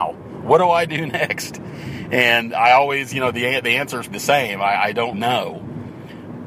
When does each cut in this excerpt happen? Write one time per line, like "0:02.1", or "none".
0:04.1
0:05.1